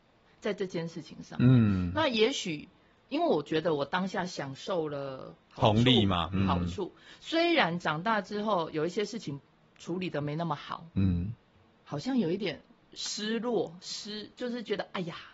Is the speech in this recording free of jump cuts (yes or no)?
yes